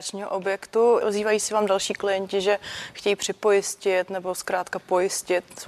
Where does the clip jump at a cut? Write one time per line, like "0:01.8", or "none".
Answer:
0:01.0

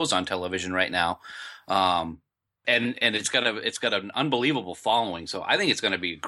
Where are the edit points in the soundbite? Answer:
0:02.6

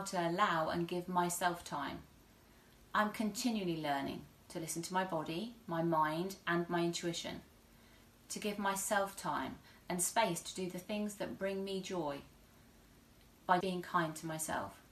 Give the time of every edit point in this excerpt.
0:13.6

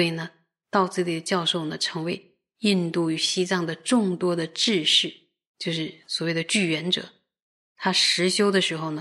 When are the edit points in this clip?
none

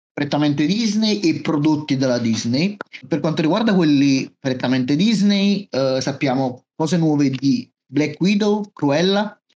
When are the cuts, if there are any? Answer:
none

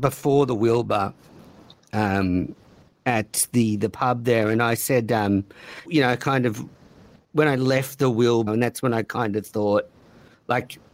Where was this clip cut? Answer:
0:05.8
0:08.5

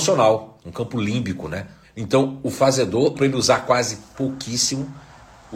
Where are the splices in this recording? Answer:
0:01.8
0:03.1

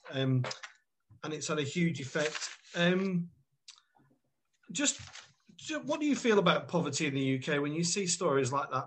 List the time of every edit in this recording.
none

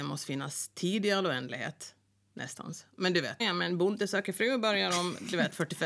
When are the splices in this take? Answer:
0:03.4

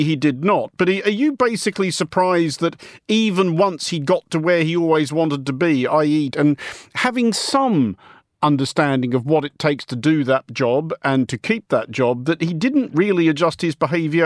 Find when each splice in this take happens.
0:06.3

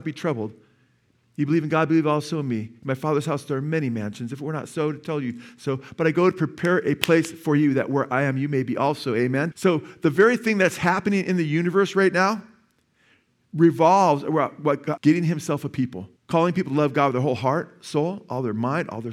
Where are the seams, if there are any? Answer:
0:09.5
0:15.0
0:16.2

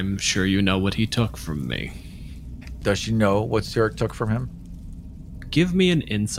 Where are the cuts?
0:02.8

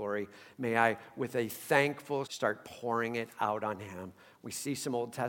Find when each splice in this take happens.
0:02.2

